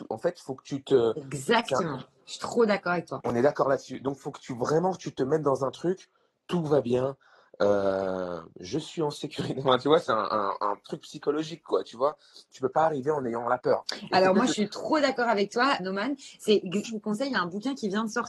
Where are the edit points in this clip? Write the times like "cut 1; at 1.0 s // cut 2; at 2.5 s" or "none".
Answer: cut 1; at 15.8 s // cut 2; at 16.8 s